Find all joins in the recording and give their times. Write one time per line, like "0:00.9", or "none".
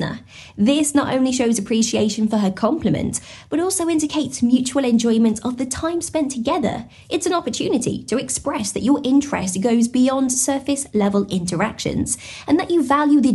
none